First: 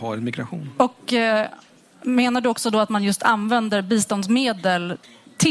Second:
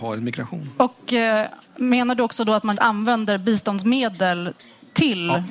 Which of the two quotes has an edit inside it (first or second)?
second